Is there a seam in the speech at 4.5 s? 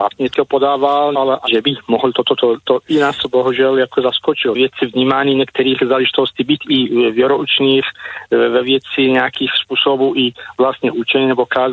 yes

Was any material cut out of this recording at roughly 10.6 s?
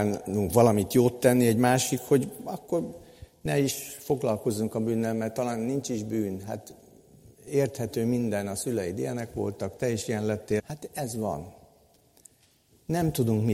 yes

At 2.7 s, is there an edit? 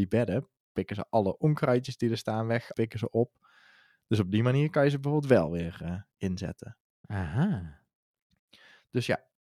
yes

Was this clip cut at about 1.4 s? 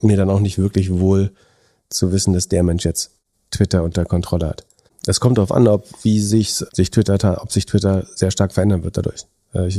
no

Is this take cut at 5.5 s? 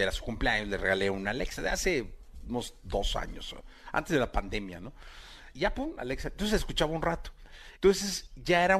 yes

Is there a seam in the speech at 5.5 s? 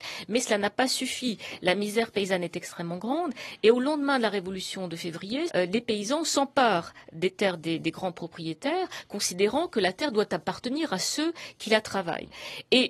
yes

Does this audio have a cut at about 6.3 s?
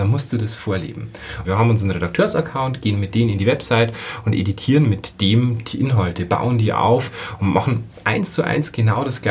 no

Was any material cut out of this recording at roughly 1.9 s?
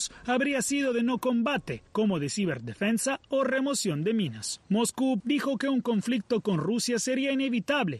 no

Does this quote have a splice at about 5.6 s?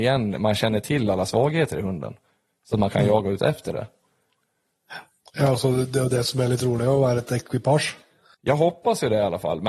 no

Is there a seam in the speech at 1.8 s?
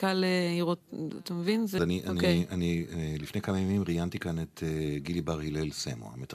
yes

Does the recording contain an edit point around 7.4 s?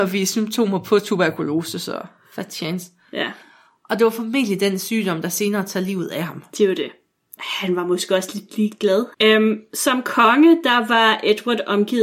yes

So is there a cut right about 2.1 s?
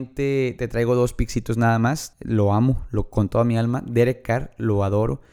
yes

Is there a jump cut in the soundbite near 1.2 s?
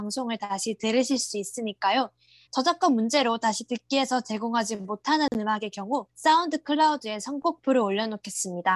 no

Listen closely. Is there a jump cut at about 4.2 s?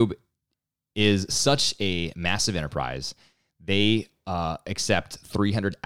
no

